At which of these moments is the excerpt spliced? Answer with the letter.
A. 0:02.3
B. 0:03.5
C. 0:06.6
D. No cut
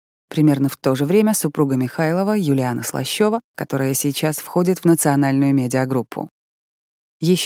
B